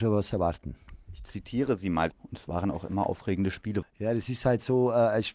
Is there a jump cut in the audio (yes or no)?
yes